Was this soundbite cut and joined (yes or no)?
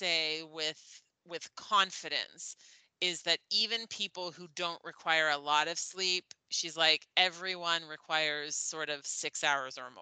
no